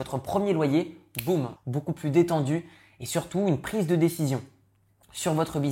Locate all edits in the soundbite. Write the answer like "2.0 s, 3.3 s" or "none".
1.6 s